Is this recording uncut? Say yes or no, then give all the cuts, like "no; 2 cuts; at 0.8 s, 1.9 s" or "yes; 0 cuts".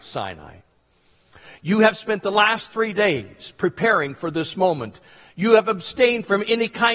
yes; 0 cuts